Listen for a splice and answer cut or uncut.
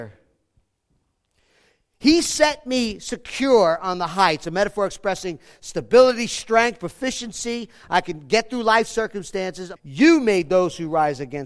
cut